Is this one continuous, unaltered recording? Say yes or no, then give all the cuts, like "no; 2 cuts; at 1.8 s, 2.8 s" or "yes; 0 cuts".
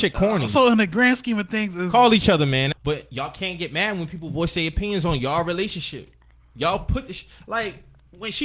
no; 1 cut; at 2.7 s